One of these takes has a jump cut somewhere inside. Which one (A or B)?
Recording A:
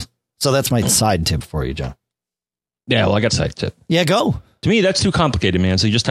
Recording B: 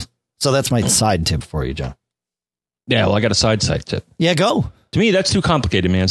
A